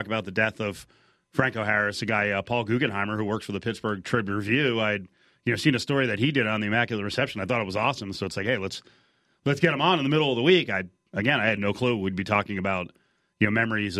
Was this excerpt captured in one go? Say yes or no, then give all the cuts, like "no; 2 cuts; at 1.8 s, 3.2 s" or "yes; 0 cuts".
yes; 0 cuts